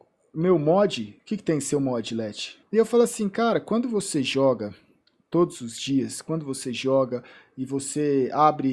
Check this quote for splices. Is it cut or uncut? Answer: cut